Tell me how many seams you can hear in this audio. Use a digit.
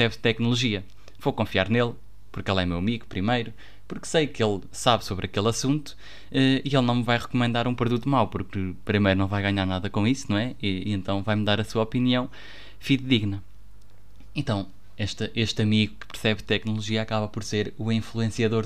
0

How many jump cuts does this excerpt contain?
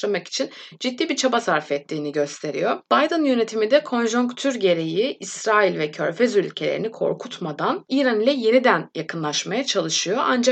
1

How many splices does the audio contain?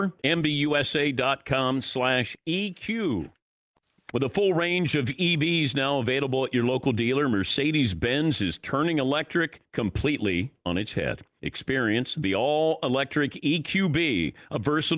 1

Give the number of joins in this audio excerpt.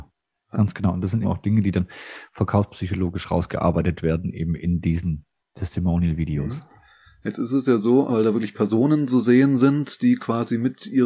2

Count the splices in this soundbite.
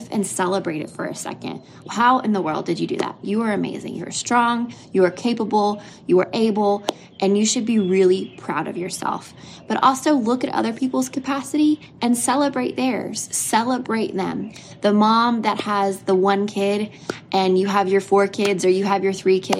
1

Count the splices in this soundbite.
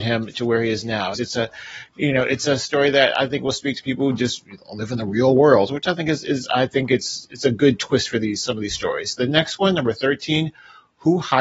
1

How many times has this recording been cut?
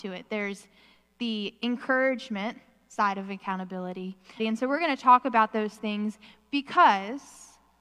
1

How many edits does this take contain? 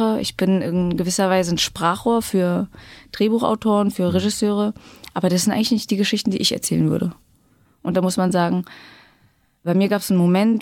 0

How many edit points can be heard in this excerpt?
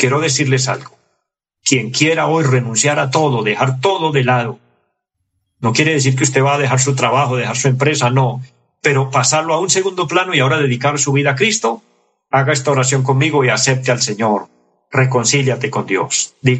0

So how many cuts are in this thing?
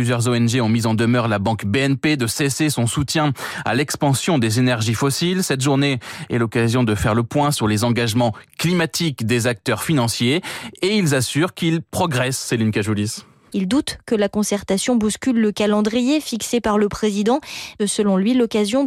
2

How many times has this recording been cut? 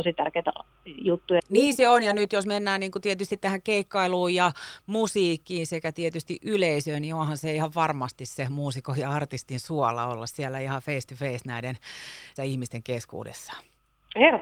2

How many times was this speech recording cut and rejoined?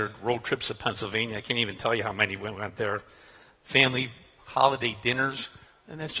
0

